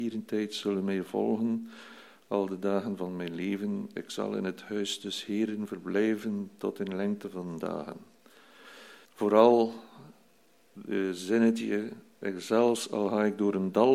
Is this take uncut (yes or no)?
no